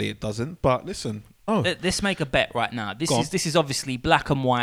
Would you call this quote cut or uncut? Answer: cut